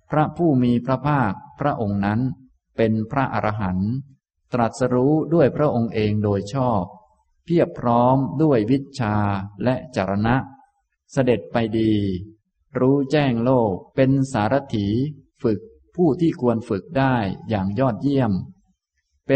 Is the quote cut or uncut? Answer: cut